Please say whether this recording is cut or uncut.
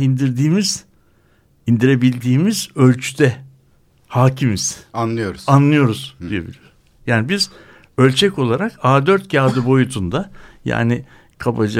uncut